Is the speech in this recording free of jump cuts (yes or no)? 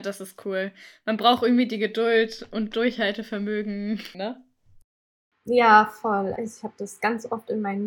no